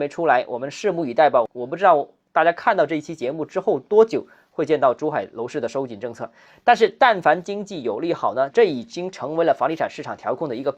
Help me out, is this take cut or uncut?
cut